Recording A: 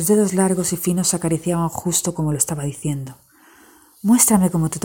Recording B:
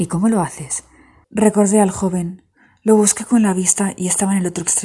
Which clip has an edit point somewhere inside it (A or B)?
B